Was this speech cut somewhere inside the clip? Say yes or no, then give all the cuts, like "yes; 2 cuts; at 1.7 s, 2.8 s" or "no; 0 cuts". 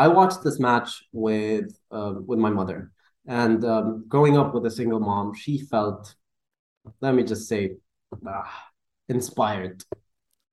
no; 0 cuts